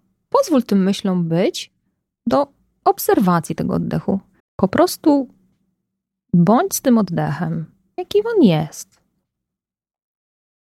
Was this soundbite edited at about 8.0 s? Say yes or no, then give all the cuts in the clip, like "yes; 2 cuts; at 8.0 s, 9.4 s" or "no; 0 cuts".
yes; 3 cuts; at 2.1 s, 4.4 s, 8.0 s